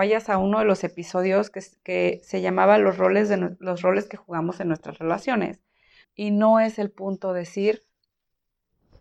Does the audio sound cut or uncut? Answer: cut